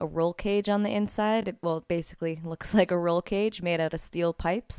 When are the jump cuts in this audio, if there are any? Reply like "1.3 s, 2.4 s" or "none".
none